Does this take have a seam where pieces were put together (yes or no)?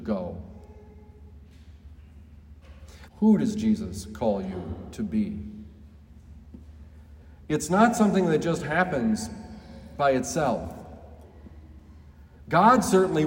yes